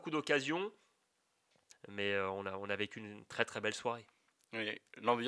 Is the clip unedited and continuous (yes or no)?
no